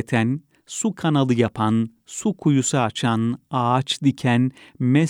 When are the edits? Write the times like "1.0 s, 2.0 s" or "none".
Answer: none

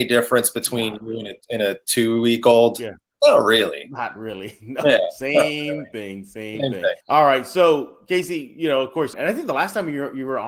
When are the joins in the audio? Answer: 7.0 s, 9.1 s

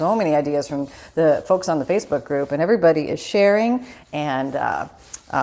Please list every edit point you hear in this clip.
none

